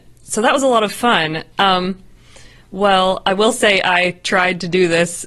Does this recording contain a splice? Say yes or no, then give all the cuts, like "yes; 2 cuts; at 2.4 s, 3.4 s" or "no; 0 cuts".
yes; 1 cut; at 1.5 s